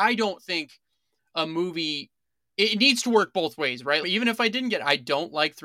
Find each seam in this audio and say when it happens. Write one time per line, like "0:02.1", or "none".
0:04.0